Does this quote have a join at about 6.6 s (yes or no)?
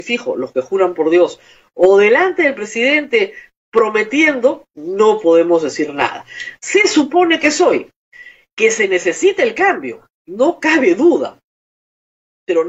no